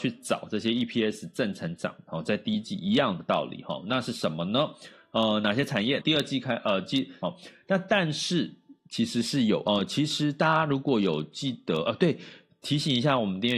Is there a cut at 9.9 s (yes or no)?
no